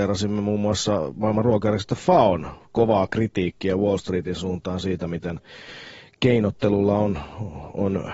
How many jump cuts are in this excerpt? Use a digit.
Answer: 0